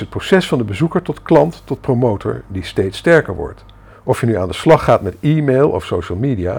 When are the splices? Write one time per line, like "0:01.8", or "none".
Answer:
0:03.9